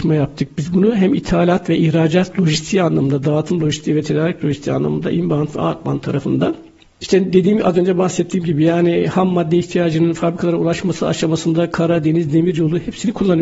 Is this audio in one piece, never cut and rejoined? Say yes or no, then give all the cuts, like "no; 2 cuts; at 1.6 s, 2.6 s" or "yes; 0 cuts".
yes; 0 cuts